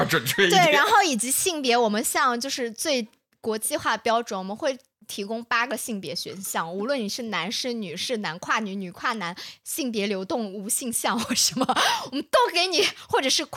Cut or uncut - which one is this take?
uncut